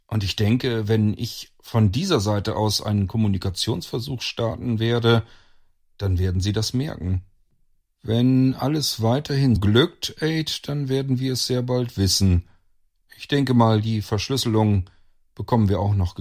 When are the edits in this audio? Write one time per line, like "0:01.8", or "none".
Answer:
0:09.6
0:13.0